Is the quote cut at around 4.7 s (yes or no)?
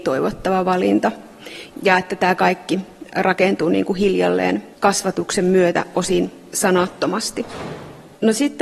yes